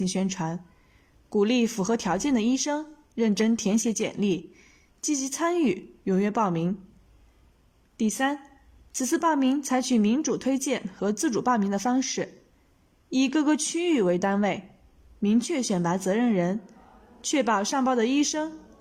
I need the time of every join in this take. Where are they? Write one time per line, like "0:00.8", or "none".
none